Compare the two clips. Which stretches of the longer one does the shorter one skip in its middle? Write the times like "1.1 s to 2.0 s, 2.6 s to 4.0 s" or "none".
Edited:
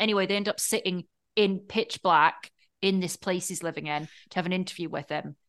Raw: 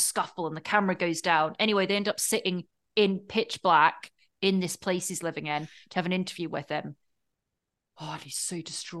none